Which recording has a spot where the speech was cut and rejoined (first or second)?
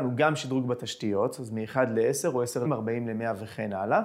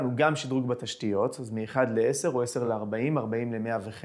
first